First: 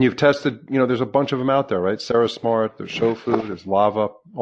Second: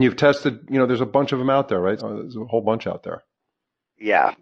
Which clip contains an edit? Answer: second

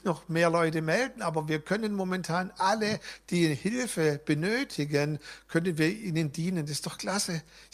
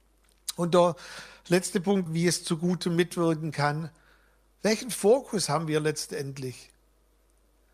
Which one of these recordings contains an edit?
second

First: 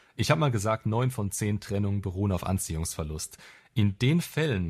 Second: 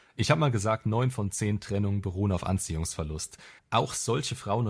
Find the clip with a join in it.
second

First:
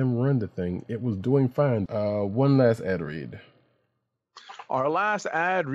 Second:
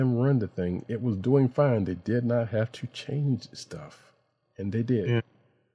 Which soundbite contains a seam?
first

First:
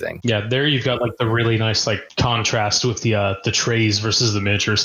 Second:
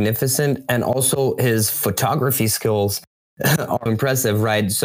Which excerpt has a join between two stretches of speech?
second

